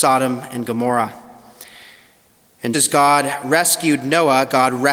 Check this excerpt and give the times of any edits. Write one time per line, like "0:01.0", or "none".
0:02.7